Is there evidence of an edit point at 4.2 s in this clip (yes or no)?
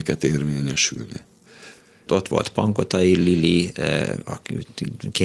no